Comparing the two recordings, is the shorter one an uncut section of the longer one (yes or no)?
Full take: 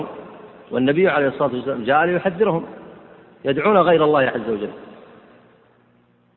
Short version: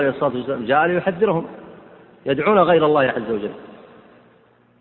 yes